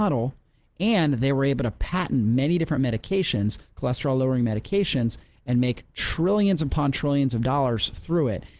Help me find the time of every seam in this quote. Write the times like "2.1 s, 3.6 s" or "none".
none